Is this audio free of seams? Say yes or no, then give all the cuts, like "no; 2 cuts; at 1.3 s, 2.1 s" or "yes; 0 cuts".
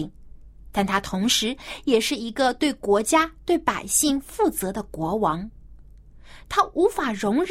yes; 0 cuts